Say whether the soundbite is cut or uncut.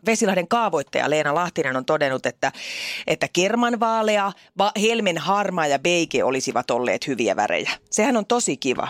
uncut